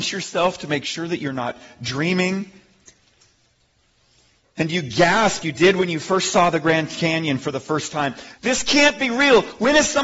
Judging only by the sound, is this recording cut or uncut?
cut